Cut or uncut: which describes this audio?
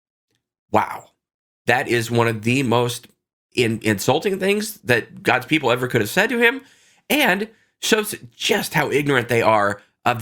uncut